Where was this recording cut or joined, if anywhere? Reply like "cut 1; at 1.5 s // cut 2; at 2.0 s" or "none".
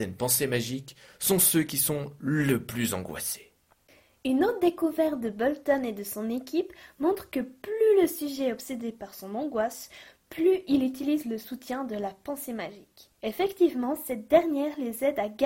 cut 1; at 13.1 s